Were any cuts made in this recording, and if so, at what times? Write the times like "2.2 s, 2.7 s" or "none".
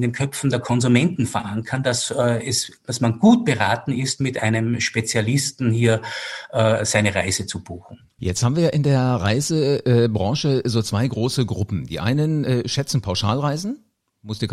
8.2 s